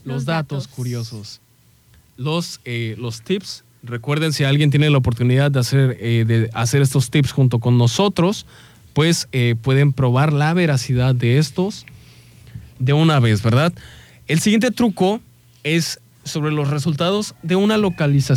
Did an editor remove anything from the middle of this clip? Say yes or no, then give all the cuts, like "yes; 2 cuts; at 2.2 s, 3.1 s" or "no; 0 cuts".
no; 0 cuts